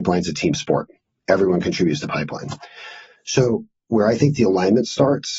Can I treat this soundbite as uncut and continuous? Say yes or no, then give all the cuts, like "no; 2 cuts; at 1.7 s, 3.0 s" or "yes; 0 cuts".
yes; 0 cuts